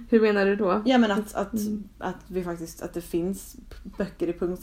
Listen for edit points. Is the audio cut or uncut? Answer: uncut